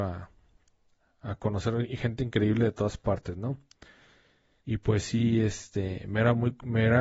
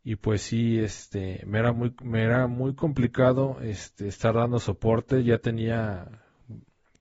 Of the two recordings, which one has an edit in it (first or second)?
first